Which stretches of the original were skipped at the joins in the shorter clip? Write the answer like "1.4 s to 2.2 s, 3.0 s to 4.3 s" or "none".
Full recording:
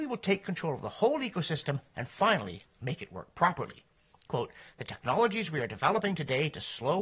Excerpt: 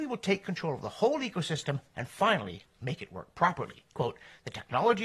3.9 s to 4.2 s